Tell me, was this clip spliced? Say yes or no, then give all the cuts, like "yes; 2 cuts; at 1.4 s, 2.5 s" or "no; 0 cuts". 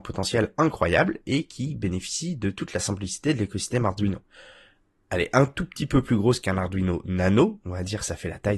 no; 0 cuts